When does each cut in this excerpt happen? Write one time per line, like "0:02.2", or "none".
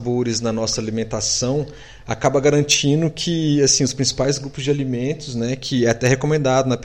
none